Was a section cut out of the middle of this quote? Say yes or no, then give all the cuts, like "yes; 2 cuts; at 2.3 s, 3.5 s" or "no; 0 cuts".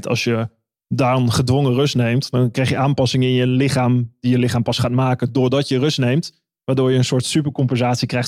no; 0 cuts